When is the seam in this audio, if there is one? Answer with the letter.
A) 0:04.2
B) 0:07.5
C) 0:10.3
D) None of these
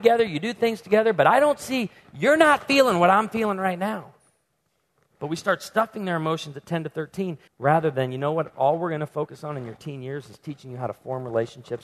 B